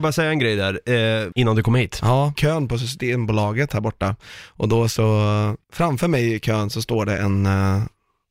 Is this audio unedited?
no; 3 cuts; at 1.3 s, 2.3 s, 5.6 s

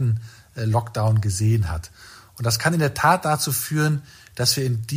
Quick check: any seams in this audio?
no; 0 cuts

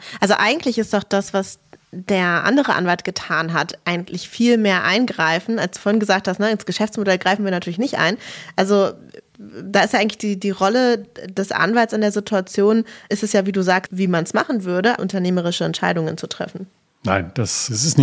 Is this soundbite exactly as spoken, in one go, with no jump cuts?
no; 2 cuts; at 13.9 s, 15.0 s

